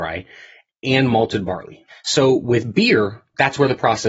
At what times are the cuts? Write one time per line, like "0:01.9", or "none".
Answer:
0:01.9